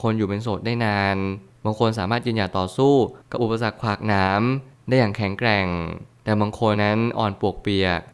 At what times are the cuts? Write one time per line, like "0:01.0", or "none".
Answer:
0:06.7